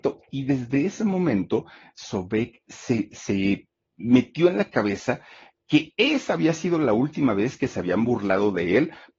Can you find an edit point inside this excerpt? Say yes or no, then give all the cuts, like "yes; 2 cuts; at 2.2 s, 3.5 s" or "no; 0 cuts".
no; 0 cuts